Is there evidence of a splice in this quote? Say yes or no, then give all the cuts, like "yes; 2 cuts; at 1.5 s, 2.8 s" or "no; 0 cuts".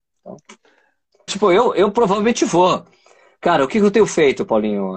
yes; 1 cut; at 1.3 s